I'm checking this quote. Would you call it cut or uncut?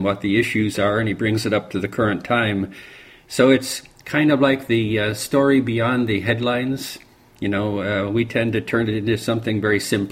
uncut